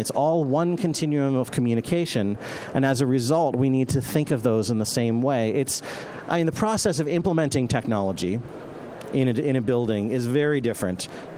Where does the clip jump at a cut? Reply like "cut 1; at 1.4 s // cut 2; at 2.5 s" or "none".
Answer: none